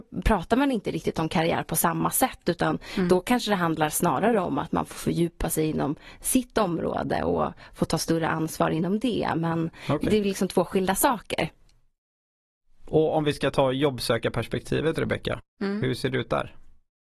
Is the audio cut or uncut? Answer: uncut